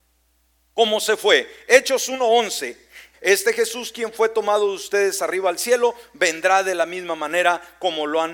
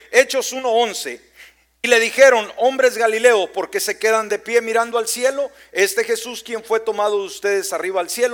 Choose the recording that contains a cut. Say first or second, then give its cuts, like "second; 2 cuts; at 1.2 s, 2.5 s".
first; 1 cut; at 3.1 s